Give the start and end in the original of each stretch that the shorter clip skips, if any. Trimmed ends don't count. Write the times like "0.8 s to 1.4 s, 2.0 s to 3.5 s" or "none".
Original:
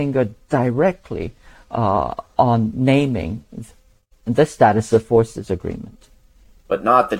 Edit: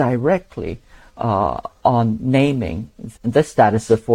3.7 s to 4.2 s